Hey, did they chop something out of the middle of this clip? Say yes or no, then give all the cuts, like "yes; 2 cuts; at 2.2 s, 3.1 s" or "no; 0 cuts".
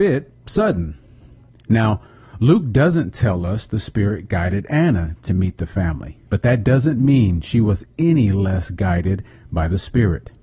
yes; 2 cuts; at 1.5 s, 6.2 s